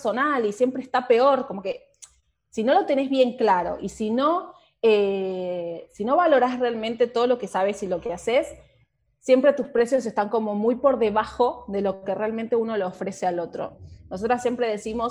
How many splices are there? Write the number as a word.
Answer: zero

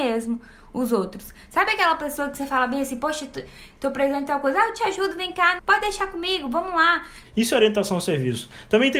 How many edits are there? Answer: two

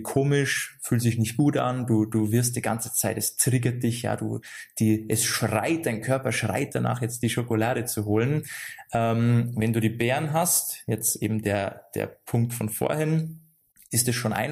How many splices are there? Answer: zero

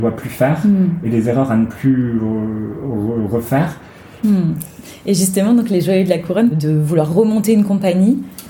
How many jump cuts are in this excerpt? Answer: two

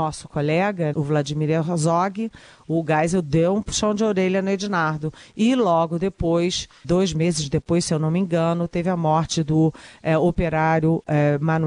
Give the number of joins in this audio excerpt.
two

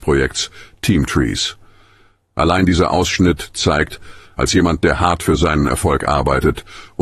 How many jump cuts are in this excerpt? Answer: two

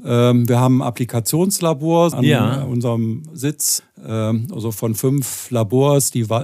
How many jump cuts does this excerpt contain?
two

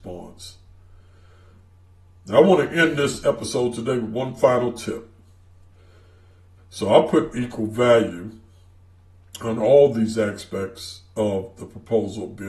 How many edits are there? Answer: one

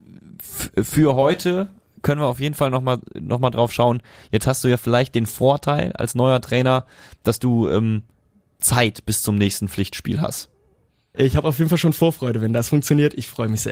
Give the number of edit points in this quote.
one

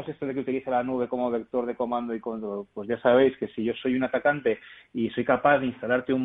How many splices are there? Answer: zero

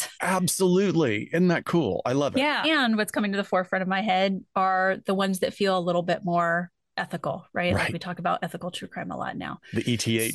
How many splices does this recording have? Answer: one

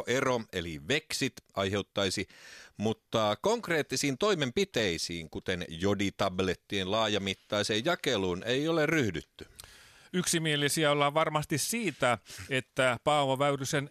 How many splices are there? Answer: zero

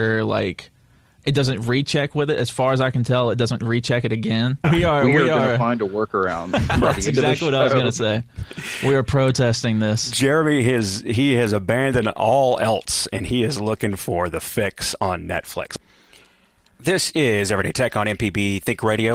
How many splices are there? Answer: one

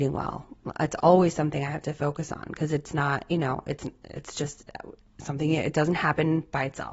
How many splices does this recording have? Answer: zero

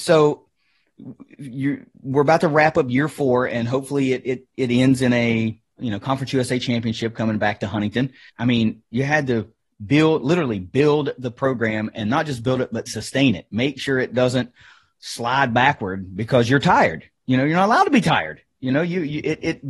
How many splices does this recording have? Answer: two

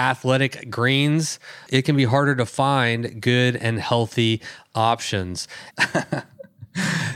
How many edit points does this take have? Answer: two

